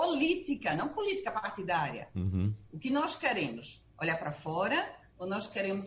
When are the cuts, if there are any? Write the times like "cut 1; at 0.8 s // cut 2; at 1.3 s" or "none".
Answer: none